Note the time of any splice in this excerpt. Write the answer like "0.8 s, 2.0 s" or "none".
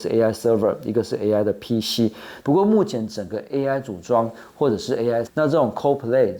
2.4 s, 5.3 s

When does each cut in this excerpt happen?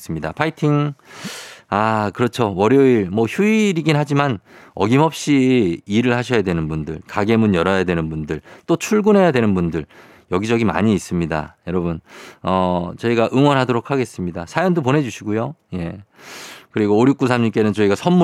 7.0 s

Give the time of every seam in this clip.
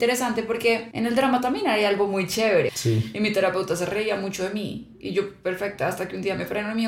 2.7 s

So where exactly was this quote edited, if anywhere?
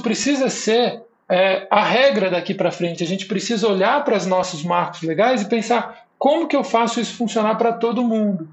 none

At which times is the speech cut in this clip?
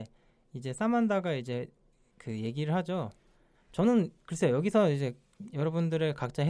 3.5 s

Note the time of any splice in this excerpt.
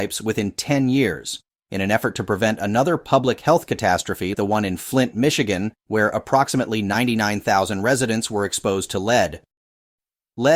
4.3 s

